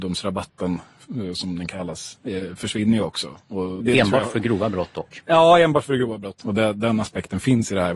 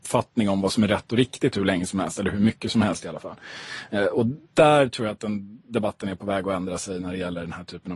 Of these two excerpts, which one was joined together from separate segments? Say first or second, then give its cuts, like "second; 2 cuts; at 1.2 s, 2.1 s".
first; 2 cuts; at 3.8 s, 6.4 s